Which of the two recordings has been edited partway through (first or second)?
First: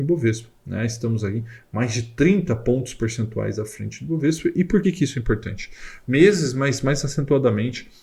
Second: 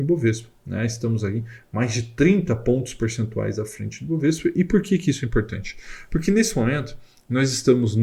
first